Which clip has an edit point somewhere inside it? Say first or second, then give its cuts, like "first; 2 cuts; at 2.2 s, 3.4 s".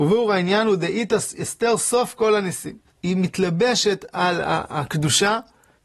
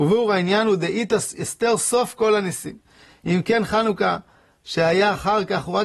first; 1 cut; at 2.9 s